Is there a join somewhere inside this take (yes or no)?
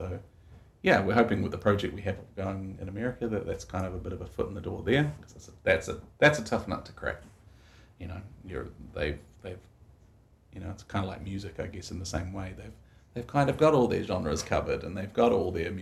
no